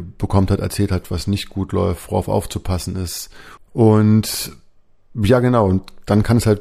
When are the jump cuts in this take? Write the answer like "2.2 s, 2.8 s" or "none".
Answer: 1.0 s, 3.6 s

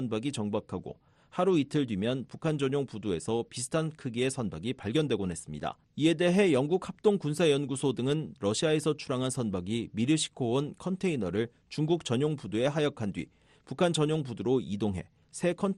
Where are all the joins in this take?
5.8 s

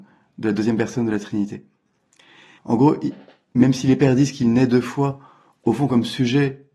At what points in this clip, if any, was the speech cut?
2.6 s

